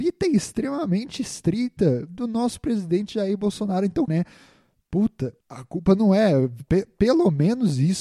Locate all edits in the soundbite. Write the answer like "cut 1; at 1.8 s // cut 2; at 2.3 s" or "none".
cut 1; at 4.1 s // cut 2; at 5.4 s